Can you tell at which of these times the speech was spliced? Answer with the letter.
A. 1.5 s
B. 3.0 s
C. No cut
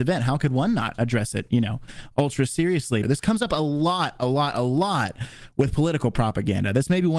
B